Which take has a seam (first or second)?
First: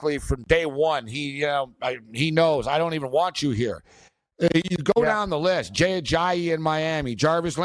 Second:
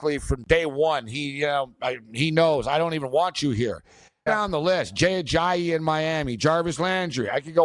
second